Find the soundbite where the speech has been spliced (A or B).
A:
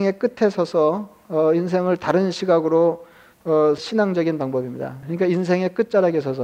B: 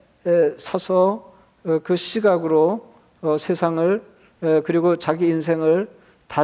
A